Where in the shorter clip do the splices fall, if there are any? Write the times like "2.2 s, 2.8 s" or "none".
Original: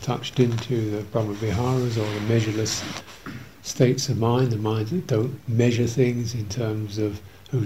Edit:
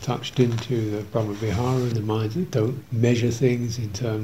1.9 s